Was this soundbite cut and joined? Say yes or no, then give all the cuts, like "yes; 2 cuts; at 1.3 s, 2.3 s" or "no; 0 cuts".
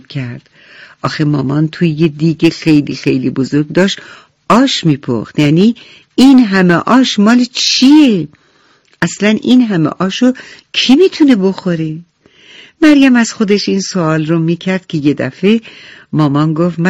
no; 0 cuts